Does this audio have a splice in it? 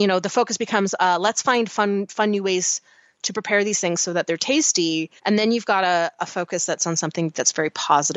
yes; 1 cut; at 5.2 s

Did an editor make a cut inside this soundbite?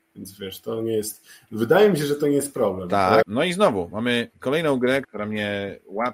yes; 2 cuts; at 3.2 s, 5.0 s

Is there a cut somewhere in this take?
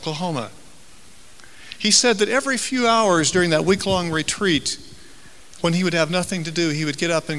no; 0 cuts

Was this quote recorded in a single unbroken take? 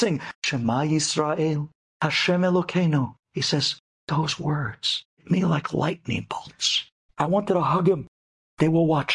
no; 1 cut; at 7.1 s

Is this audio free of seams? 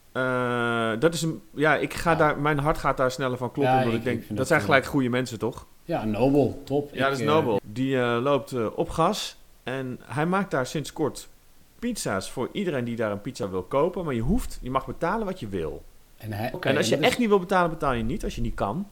no; 2 cuts; at 7.6 s, 16.5 s

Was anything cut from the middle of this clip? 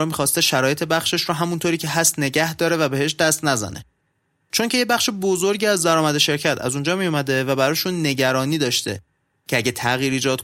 no; 0 cuts

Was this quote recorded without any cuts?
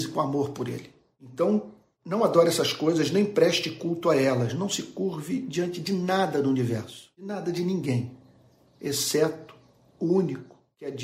yes; 0 cuts

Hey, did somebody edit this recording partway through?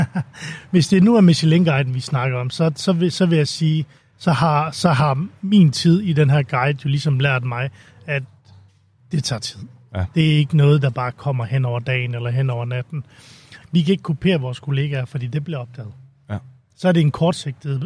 yes; 1 cut; at 13.6 s

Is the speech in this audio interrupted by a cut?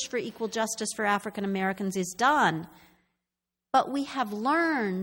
no; 0 cuts

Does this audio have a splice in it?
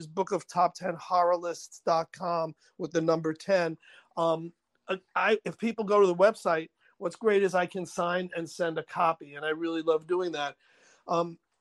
no; 0 cuts

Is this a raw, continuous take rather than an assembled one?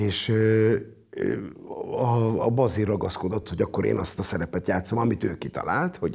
yes; 0 cuts

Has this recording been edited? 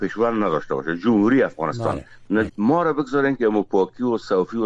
yes; 1 cut; at 2.5 s

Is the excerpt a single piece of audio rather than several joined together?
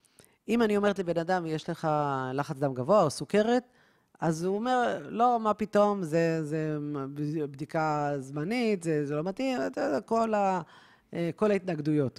yes; 0 cuts

